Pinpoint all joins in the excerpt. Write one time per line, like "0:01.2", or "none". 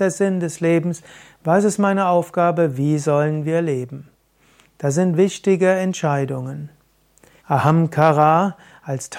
0:07.4